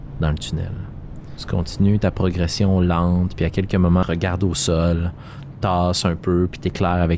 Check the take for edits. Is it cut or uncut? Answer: cut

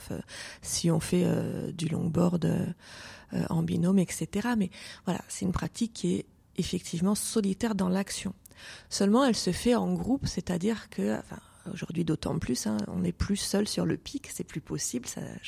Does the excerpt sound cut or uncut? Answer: uncut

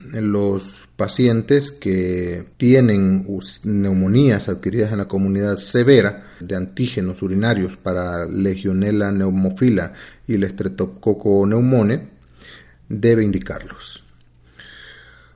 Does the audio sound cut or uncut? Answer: cut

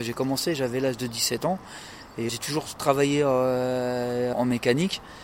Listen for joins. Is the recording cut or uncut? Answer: cut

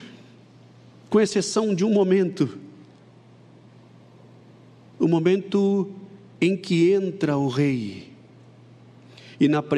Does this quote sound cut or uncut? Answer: uncut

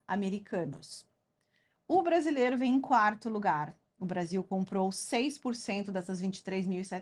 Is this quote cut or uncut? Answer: cut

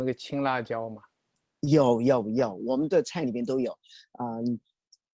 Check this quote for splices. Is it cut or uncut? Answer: uncut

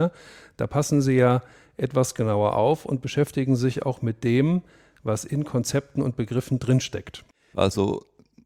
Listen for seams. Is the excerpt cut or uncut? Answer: cut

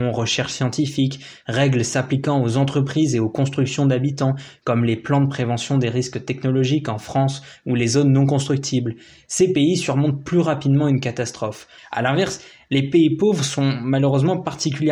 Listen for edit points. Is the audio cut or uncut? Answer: cut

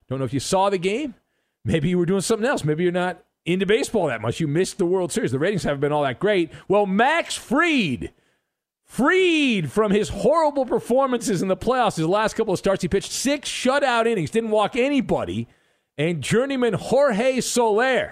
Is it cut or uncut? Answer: uncut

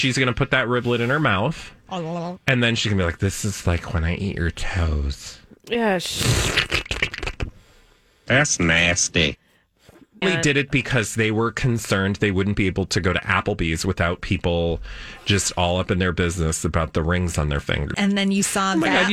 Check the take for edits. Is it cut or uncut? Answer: cut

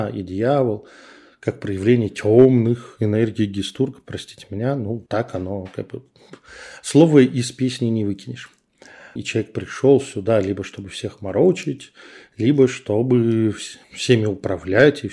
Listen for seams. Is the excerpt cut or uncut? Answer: cut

